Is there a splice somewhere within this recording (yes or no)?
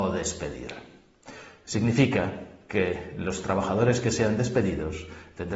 no